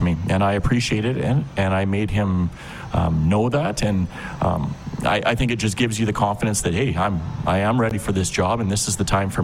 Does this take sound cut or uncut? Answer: uncut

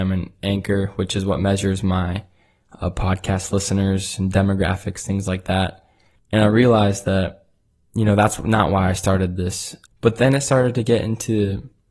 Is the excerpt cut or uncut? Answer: cut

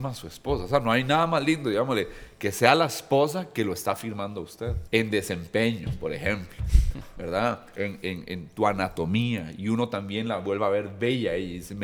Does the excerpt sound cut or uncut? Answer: cut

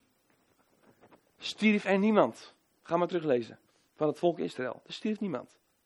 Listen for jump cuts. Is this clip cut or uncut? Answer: uncut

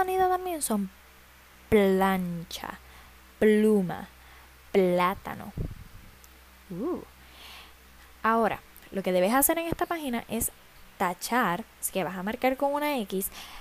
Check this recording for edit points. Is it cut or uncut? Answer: uncut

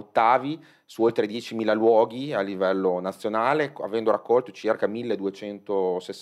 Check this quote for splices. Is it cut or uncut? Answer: uncut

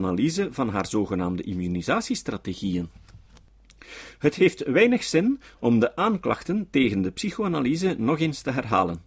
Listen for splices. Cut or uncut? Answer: uncut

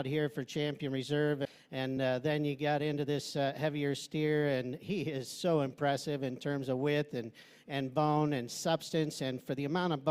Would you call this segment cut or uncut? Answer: uncut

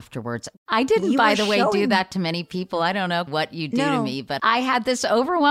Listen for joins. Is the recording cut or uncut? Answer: cut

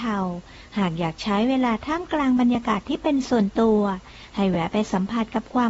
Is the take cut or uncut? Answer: uncut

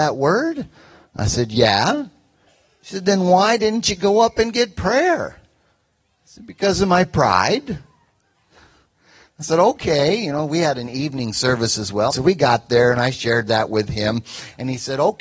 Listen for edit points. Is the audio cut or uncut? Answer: cut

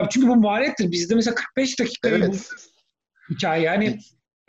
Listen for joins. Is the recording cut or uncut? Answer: cut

